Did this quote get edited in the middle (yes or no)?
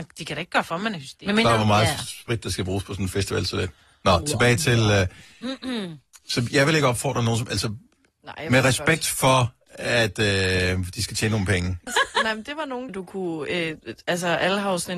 yes